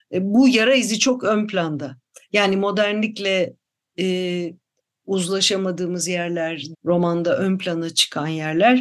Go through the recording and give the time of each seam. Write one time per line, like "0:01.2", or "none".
0:06.7

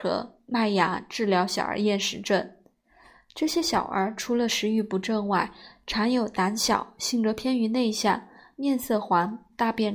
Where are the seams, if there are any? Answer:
none

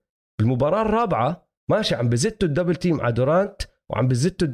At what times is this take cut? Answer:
0:01.6

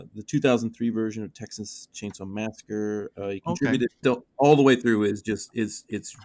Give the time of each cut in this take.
0:04.0

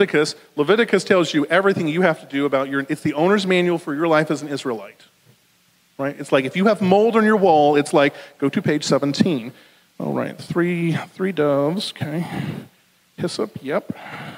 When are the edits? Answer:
none

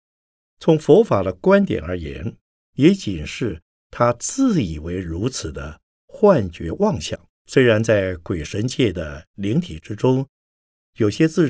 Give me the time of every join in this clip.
0:02.6
0:07.4

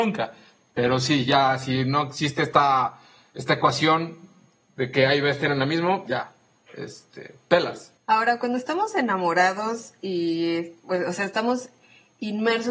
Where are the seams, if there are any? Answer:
0:08.0

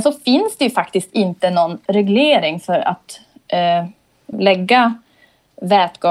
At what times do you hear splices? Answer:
0:04.3

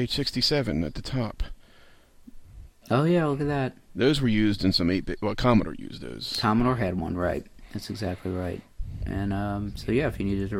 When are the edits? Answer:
none

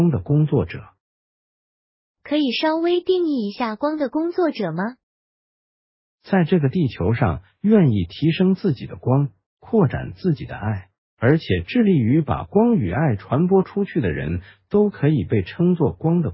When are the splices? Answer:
none

